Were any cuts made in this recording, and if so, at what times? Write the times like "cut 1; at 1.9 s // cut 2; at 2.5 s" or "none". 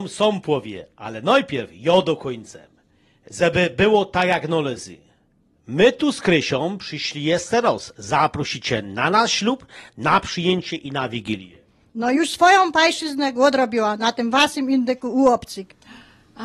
none